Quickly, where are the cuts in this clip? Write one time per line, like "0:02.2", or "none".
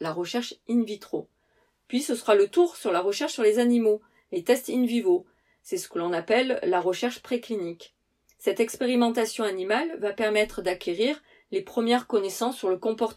none